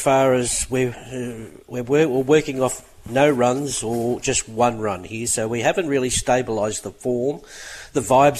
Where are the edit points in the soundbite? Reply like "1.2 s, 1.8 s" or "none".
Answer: none